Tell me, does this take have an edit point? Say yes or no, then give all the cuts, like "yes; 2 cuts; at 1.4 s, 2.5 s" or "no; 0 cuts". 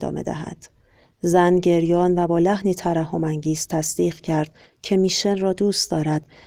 no; 0 cuts